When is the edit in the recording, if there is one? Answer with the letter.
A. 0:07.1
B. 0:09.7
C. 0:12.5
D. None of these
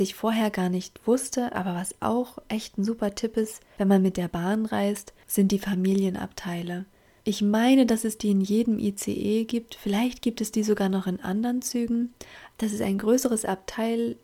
D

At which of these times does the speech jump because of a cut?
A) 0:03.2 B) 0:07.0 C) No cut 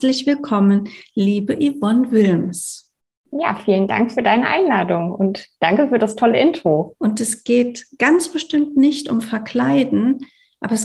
B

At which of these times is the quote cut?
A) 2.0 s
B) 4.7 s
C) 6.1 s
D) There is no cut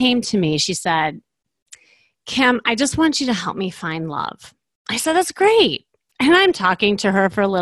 D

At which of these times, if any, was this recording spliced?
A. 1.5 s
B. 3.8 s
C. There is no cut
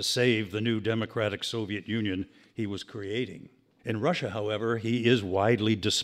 B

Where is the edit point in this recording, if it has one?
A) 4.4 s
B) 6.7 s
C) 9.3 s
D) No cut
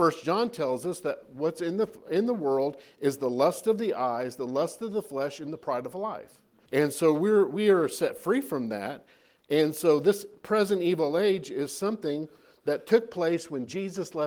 B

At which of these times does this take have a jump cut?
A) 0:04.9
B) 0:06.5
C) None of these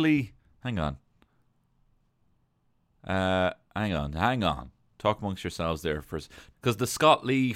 B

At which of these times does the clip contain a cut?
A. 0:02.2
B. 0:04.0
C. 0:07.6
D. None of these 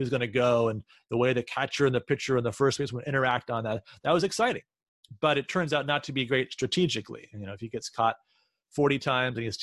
D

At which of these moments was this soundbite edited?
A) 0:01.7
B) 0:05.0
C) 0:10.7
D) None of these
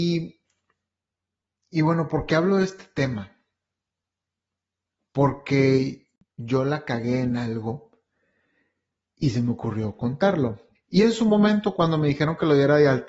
C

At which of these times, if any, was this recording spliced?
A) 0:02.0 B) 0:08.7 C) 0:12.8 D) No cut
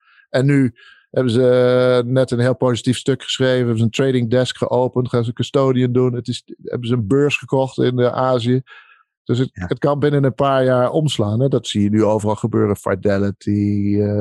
D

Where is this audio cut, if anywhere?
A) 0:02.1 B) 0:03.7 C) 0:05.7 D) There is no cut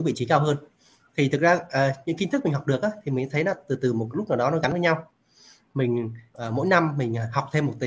D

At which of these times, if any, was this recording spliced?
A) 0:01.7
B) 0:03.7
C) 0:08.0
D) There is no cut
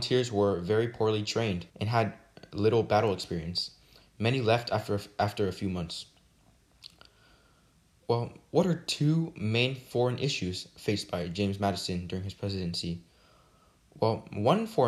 A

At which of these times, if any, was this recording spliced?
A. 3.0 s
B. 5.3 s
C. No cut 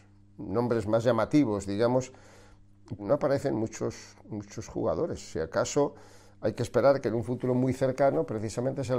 A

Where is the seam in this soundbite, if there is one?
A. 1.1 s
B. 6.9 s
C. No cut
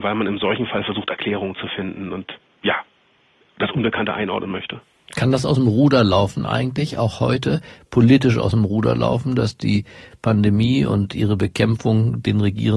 C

